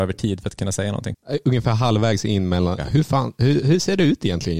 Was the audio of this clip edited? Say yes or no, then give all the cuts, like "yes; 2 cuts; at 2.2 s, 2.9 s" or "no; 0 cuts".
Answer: yes; 1 cut; at 2.8 s